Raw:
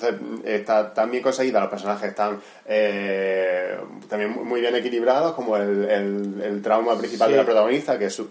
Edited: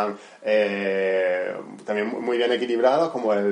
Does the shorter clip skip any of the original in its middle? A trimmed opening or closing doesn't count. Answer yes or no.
no